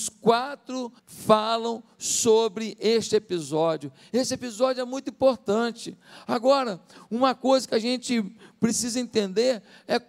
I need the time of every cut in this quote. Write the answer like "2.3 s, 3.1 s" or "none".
1.0 s